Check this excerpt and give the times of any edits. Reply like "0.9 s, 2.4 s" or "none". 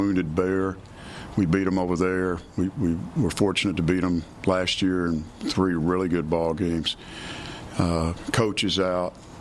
none